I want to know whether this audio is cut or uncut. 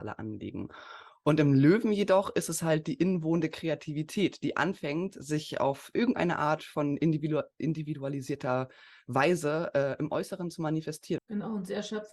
cut